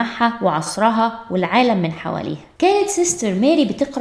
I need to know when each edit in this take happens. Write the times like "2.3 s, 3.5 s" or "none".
2.6 s